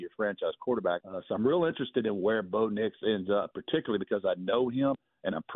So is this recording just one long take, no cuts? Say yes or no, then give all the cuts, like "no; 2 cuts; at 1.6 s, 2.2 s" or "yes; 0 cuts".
no; 1 cut; at 1.0 s